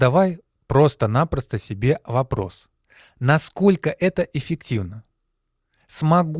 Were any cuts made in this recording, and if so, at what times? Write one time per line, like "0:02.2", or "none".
none